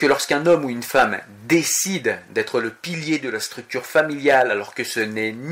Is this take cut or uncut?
uncut